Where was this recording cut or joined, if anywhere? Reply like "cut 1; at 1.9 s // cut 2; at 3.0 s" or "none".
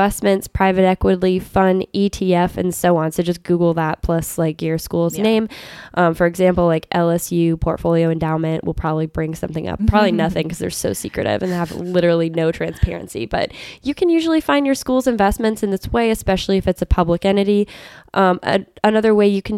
cut 1; at 9.8 s